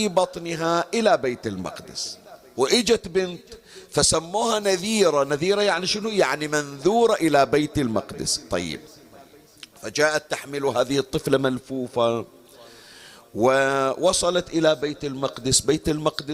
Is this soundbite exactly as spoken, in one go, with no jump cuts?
yes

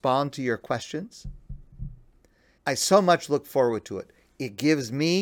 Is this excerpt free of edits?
no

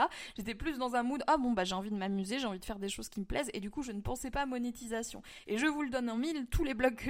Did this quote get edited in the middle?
no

